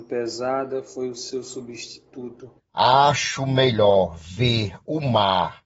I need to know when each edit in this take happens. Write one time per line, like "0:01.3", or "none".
0:02.6